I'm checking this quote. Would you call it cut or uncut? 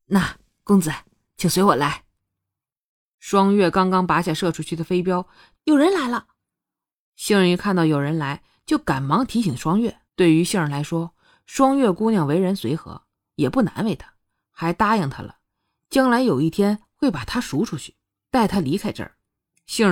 cut